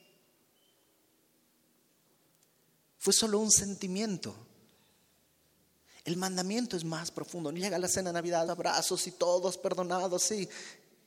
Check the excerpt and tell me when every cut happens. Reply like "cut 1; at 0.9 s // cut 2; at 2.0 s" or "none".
cut 1; at 8.5 s